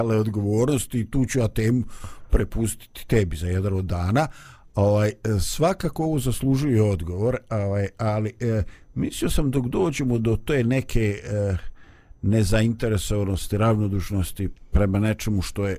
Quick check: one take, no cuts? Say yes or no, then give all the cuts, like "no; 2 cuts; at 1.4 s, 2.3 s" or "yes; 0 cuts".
yes; 0 cuts